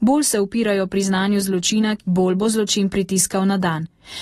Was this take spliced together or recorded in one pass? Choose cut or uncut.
cut